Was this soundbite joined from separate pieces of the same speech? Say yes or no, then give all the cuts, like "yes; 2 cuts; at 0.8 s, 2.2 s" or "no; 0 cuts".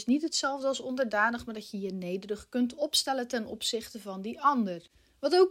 no; 0 cuts